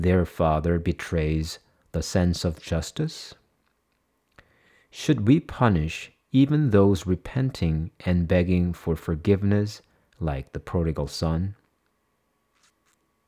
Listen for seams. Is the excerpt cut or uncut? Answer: uncut